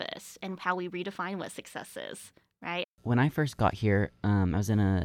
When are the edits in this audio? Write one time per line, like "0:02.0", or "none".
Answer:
0:02.8

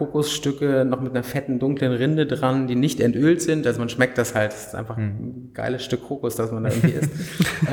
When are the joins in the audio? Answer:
none

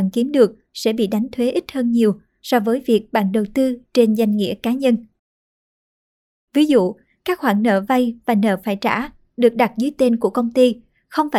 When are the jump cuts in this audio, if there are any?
0:06.5

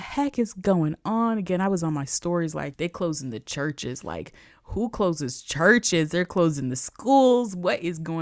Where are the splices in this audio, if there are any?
0:02.7

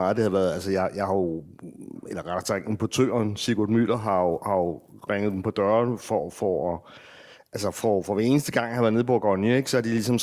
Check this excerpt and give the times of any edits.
none

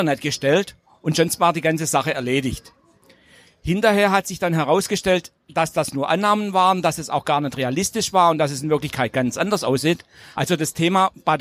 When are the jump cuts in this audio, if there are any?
0:10.3

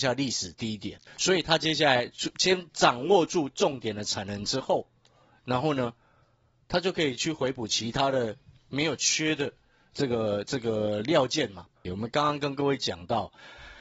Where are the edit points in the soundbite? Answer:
0:01.1
0:11.9

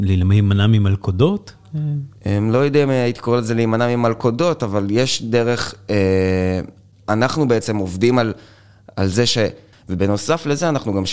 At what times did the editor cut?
0:02.2
0:09.7

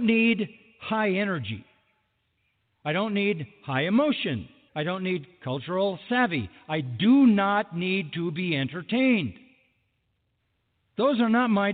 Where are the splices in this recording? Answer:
0:04.7

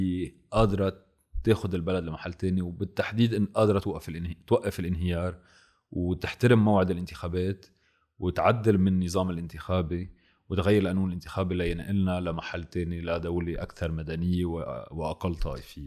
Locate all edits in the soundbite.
none

